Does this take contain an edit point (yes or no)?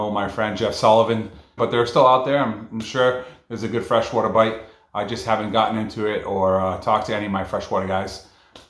yes